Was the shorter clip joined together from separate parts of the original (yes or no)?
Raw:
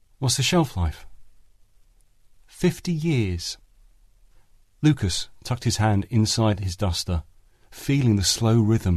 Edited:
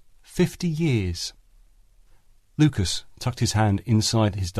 no